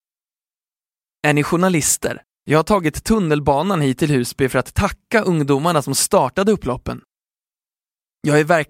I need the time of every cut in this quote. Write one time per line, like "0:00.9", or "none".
0:02.2